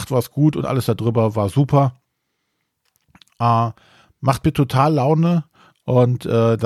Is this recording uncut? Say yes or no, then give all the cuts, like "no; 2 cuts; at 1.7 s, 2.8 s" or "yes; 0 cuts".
yes; 0 cuts